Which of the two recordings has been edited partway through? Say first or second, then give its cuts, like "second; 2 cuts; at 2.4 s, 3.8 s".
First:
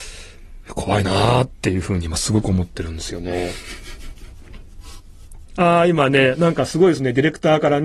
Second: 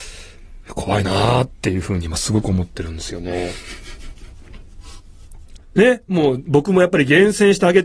second; 1 cut; at 5.6 s